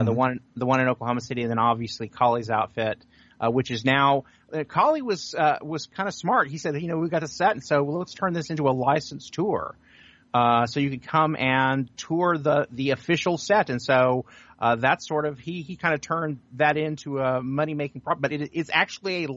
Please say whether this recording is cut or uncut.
uncut